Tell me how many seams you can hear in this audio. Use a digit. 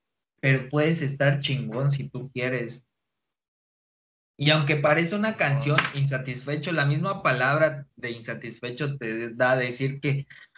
0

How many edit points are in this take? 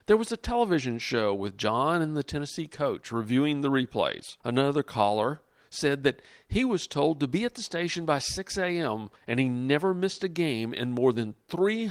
2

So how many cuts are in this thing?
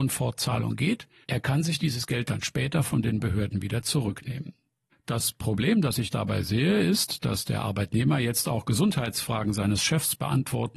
0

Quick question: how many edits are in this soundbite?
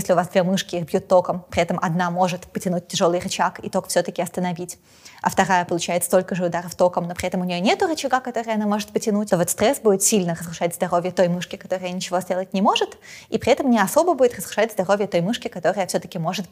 1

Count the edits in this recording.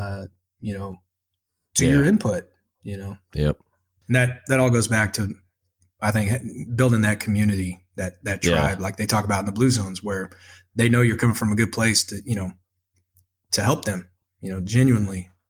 0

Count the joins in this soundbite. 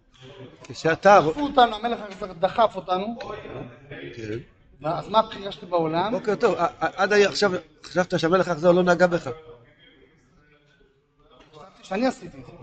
0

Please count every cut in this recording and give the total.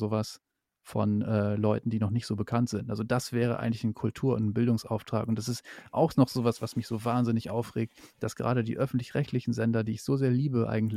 0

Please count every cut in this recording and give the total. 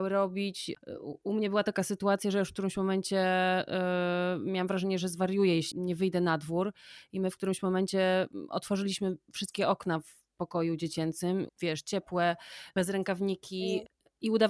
2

